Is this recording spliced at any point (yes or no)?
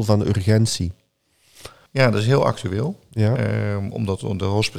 yes